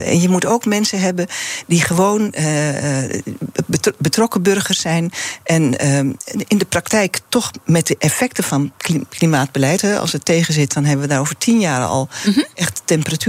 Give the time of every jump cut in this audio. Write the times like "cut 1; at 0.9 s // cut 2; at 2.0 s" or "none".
none